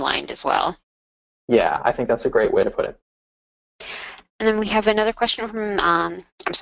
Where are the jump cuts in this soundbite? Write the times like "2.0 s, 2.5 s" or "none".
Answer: none